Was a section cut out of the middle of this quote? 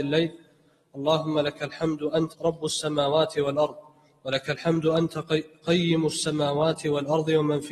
yes; 1 cut; at 2.3 s

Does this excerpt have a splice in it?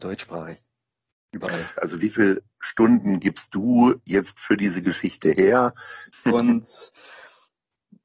yes; 2 cuts; at 1.8 s, 6.1 s

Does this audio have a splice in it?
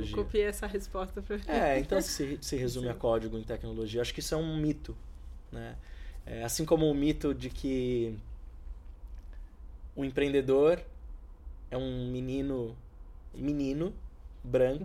yes; 1 cut; at 2.1 s

